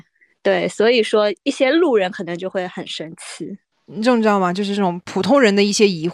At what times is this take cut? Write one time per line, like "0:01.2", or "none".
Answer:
0:03.7